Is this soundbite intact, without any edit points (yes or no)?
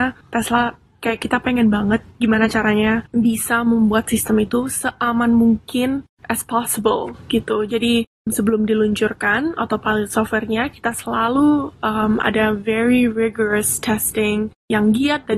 yes